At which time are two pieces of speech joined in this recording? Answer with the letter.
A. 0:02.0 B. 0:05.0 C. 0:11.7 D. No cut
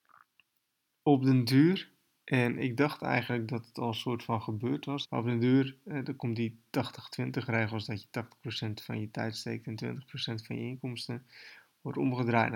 B